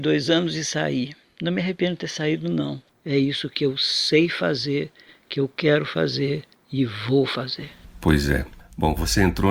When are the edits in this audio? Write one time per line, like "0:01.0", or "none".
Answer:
0:02.9